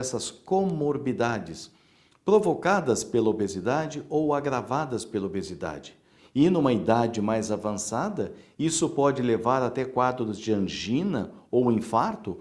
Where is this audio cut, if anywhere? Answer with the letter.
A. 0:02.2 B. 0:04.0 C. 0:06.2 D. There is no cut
C